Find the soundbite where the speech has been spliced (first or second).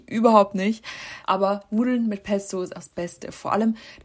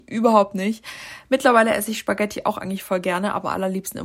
first